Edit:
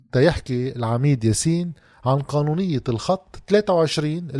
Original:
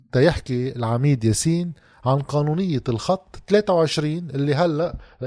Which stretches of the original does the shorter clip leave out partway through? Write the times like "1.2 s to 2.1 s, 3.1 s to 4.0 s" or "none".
none